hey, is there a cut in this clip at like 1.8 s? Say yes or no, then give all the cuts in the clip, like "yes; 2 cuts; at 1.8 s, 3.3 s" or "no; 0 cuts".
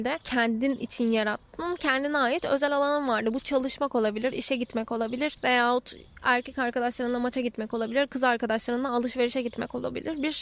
no; 0 cuts